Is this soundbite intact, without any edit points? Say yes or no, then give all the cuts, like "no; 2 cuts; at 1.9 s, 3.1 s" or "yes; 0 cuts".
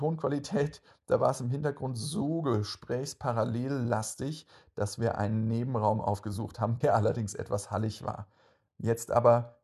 no; 1 cut; at 6.8 s